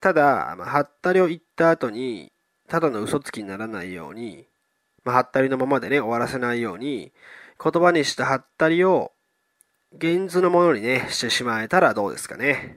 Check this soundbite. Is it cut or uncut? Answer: uncut